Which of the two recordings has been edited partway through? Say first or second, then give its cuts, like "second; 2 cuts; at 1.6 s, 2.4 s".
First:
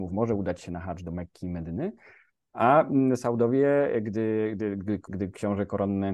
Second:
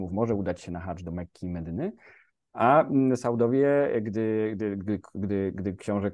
first; 1 cut; at 5.1 s